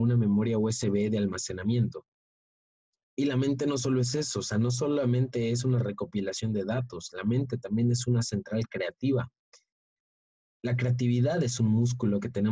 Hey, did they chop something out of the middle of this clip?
no; 0 cuts

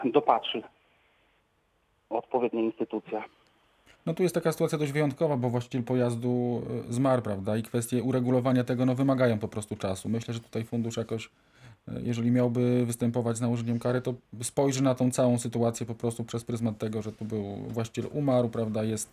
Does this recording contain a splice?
no; 0 cuts

